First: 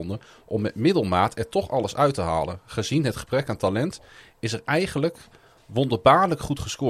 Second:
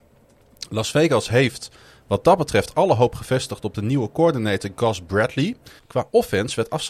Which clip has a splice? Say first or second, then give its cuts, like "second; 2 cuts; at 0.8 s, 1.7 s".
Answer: second; 1 cut; at 5.8 s